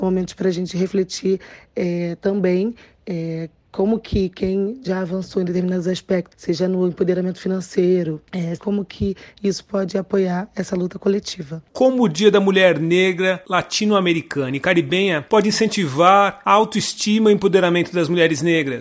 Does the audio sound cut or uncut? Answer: cut